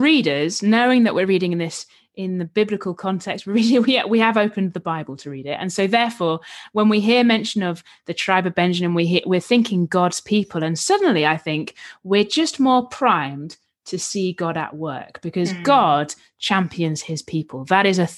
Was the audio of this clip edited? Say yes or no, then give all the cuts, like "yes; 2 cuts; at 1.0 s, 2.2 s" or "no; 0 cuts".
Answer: no; 0 cuts